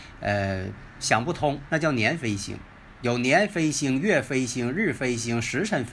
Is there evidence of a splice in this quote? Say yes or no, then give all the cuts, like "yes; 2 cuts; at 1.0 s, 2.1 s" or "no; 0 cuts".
yes; 1 cut; at 1.6 s